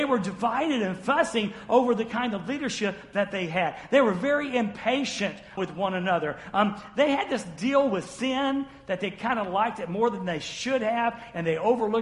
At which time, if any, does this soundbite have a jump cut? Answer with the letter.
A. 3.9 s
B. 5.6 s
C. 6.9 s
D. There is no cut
B